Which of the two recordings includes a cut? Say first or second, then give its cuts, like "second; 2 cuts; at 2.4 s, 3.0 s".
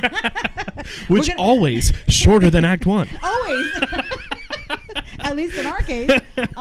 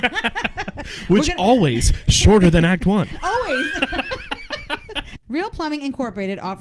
second; 1 cut; at 5.2 s